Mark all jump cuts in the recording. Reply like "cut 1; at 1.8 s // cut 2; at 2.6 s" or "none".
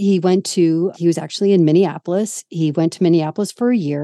cut 1; at 0.9 s